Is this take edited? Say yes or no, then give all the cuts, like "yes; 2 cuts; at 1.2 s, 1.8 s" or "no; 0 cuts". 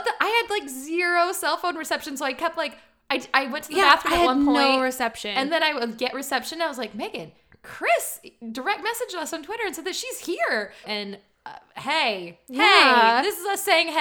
yes; 1 cut; at 10.8 s